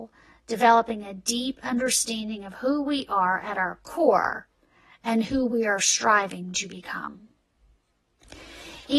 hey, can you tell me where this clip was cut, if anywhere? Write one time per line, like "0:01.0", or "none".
none